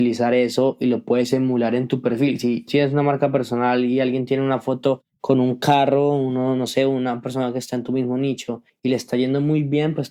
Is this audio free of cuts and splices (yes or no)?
no